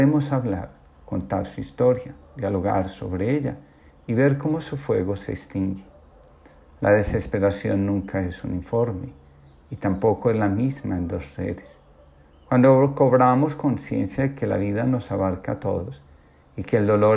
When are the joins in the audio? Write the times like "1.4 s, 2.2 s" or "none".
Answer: none